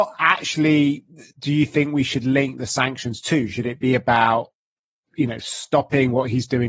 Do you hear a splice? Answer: no; 0 cuts

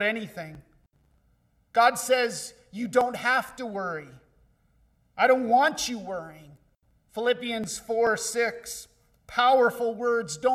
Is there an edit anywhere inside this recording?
no; 0 cuts

